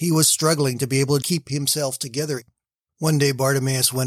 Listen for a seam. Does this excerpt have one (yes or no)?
yes